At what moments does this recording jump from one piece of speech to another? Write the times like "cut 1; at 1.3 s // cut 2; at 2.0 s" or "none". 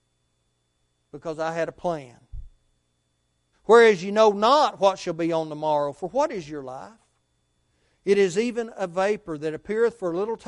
cut 1; at 3.5 s